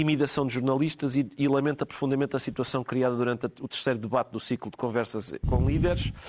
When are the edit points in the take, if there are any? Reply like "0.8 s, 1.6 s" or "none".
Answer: none